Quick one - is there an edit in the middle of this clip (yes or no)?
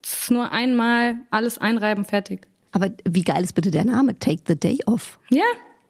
no